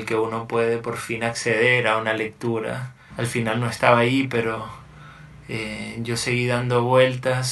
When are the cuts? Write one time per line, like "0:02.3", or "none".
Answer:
0:03.1